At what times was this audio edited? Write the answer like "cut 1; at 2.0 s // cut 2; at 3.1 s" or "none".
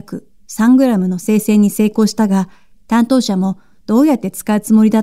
cut 1; at 2.7 s